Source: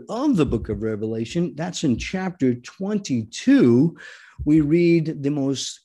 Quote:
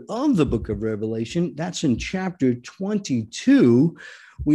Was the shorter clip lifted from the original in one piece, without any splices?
yes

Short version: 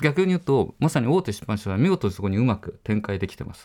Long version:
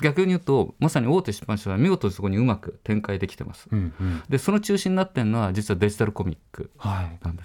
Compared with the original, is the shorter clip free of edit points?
yes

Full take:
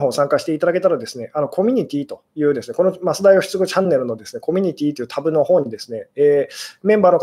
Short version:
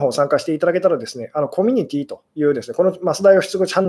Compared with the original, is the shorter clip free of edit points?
yes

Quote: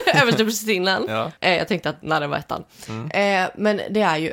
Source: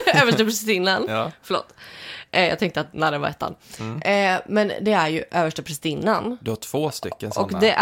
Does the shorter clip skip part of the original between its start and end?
yes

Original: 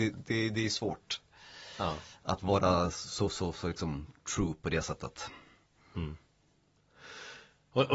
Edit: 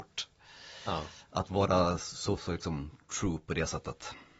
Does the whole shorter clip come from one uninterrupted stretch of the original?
no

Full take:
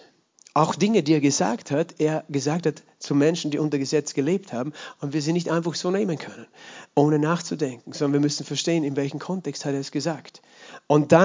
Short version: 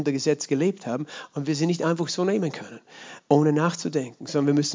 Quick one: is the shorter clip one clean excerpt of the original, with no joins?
yes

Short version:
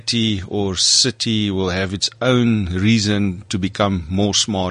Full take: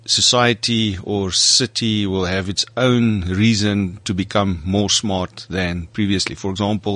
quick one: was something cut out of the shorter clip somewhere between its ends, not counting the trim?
no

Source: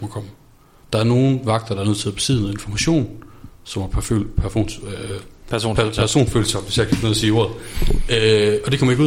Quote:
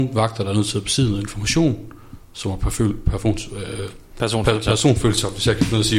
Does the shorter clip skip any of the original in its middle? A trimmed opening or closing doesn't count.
no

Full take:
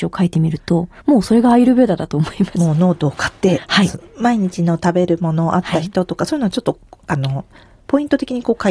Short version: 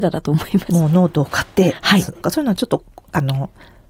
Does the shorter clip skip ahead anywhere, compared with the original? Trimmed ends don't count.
yes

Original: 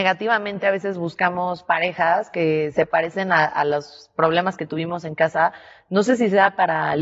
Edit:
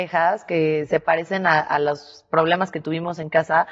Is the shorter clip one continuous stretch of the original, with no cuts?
yes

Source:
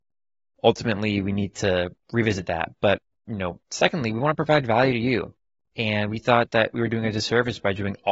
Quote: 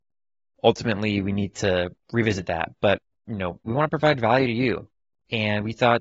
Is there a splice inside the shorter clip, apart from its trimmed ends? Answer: yes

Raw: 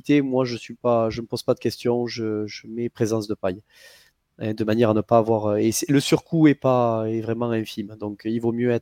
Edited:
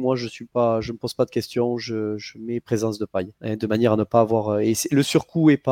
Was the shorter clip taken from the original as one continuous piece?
no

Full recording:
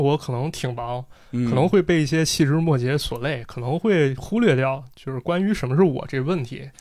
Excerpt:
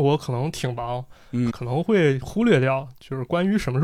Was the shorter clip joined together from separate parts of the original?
yes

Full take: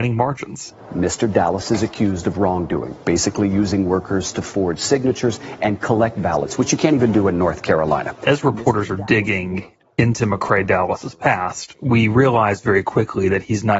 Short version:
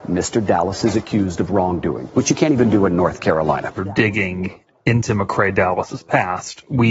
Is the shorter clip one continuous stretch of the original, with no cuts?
no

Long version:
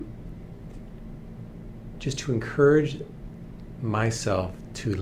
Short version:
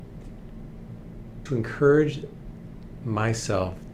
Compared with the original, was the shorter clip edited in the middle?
yes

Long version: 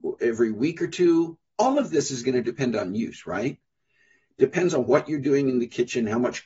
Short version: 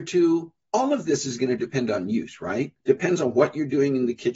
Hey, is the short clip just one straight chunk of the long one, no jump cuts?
no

